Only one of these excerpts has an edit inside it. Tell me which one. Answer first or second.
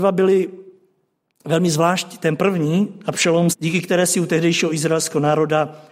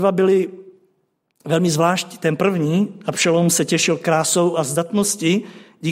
first